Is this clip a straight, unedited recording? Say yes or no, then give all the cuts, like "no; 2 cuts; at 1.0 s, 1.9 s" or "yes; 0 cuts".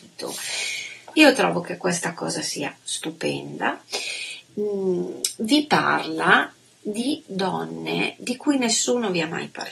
no; 2 cuts; at 1.1 s, 4.5 s